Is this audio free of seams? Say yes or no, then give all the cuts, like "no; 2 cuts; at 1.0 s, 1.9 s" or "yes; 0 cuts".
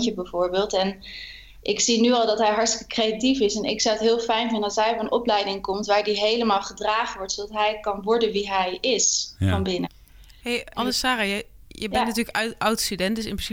no; 1 cut; at 10.7 s